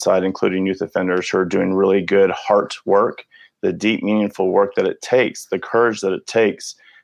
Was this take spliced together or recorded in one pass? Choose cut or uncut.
uncut